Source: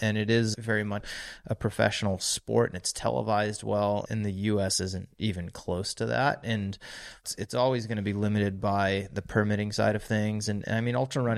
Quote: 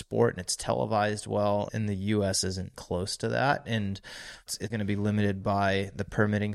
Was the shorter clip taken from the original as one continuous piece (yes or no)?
no